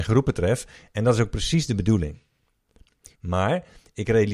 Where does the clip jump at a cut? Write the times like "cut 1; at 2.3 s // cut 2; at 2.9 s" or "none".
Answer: cut 1; at 3.2 s

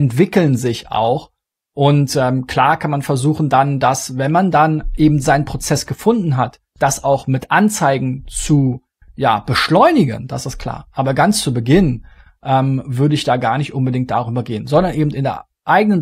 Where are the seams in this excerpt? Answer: none

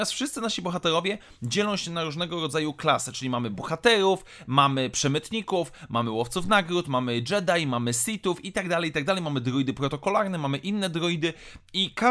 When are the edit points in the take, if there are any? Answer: none

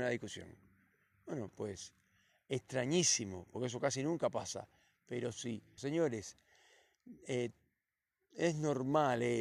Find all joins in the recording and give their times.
cut 1; at 5.8 s

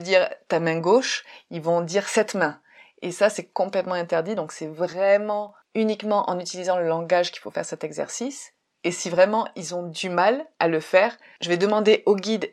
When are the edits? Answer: none

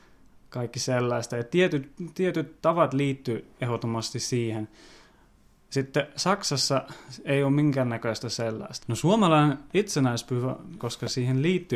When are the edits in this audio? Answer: cut 1; at 8.8 s // cut 2; at 10.8 s

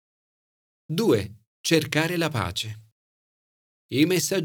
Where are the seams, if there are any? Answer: none

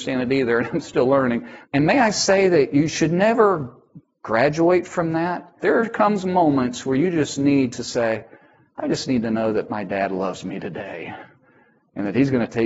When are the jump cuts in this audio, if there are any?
cut 1; at 1.7 s // cut 2; at 5.6 s

